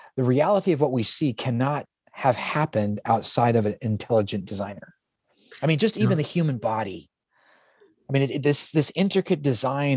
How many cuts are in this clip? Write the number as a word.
zero